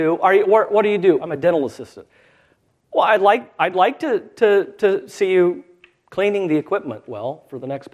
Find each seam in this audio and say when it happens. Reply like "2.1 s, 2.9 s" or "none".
1.2 s